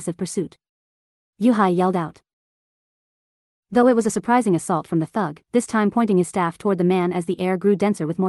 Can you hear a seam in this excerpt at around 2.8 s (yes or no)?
no